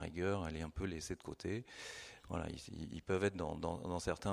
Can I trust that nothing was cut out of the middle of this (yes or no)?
yes